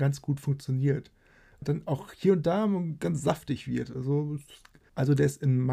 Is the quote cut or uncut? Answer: cut